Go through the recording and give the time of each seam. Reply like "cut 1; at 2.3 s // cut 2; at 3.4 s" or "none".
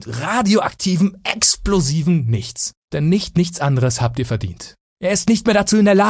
cut 1; at 2.8 s // cut 2; at 4.8 s